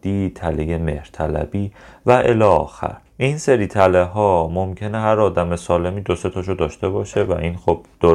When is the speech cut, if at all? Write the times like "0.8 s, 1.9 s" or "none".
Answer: 3.1 s